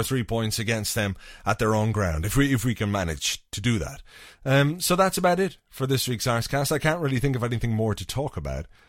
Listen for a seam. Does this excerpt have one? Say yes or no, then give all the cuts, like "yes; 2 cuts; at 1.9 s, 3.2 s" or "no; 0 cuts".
no; 0 cuts